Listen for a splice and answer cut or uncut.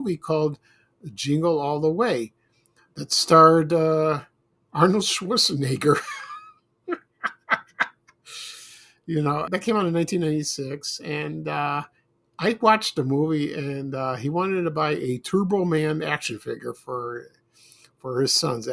cut